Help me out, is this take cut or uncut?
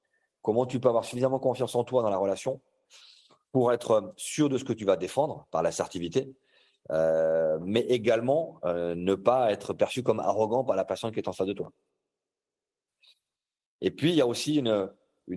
uncut